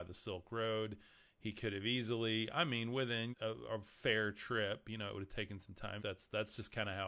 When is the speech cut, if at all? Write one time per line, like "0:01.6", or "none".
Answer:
0:03.3
0:06.0